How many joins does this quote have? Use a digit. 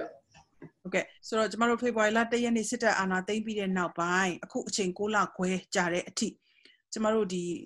1